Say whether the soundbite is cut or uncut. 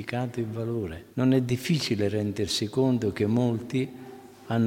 cut